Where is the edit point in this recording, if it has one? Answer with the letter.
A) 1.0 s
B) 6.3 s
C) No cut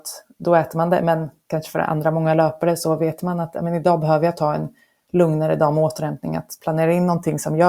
C